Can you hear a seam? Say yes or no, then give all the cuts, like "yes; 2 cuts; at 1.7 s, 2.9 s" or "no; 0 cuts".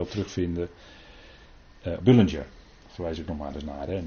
yes; 1 cut; at 2.0 s